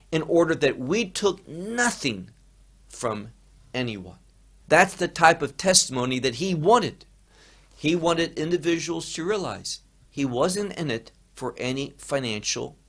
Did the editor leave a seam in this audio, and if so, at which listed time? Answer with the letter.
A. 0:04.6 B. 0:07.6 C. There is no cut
A